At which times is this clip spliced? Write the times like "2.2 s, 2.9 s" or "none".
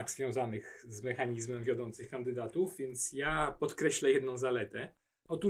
none